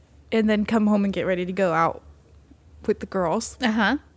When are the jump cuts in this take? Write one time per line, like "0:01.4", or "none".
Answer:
none